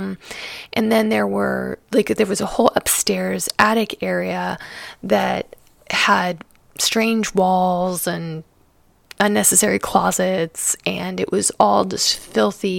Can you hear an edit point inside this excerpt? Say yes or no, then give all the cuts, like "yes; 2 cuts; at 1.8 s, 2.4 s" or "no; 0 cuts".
no; 0 cuts